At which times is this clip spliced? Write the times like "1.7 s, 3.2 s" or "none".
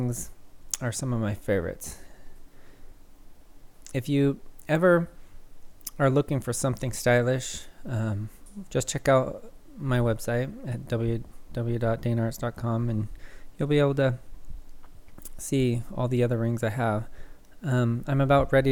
8.7 s